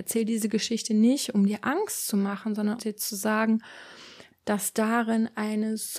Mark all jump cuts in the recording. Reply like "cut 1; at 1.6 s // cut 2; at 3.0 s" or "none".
cut 1; at 2.8 s // cut 2; at 4.3 s

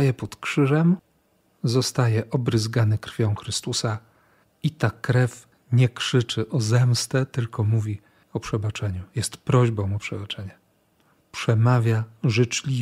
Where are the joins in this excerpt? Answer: none

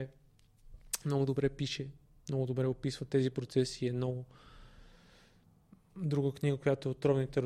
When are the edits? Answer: none

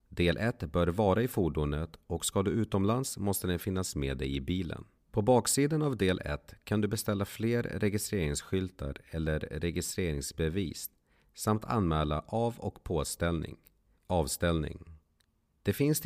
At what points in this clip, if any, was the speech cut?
cut 1; at 5.1 s // cut 2; at 14.0 s

